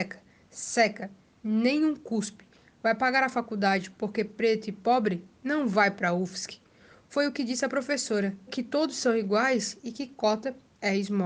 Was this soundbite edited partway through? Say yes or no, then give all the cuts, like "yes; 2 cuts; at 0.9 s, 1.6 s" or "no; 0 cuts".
yes; 1 cut; at 8.5 s